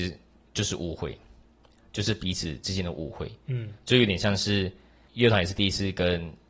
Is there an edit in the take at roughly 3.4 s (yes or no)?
no